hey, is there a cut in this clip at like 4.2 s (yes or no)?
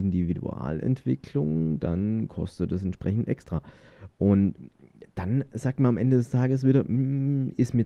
no